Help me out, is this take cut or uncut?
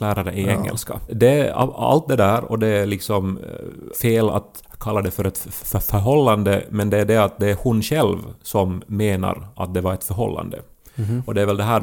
cut